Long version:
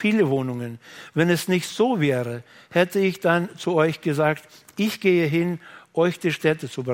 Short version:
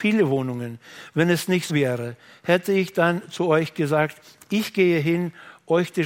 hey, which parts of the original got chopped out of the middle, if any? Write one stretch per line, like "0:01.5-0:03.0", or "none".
0:01.7-0:02.0